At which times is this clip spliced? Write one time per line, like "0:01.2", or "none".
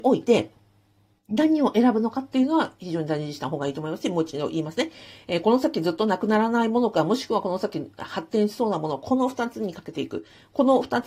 none